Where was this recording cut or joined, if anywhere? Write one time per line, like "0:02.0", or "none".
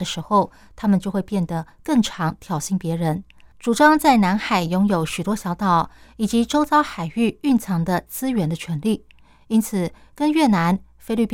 0:03.5

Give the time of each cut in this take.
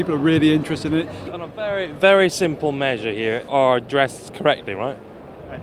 0:01.3
0:03.5

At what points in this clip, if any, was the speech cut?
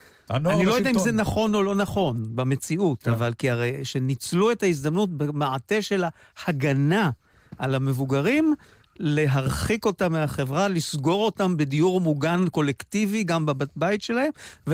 none

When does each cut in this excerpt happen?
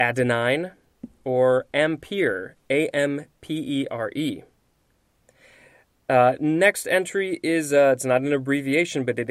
none

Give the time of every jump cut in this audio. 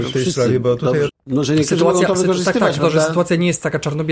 0:01.1
0:02.8

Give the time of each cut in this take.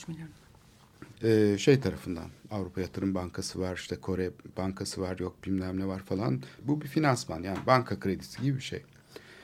0:01.1
0:06.6

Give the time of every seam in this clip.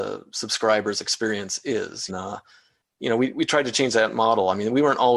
0:02.1

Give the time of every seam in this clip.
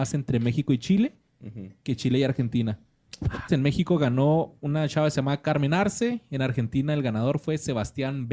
0:03.5

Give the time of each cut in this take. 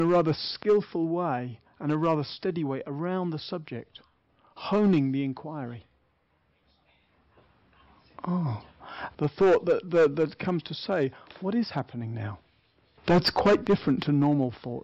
0:09.1
0:13.0

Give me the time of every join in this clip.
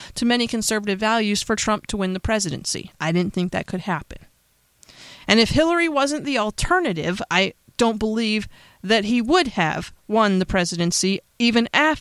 0:02.9

